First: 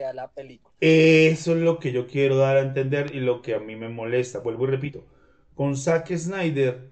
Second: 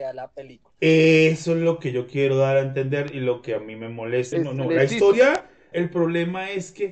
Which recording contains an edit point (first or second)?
second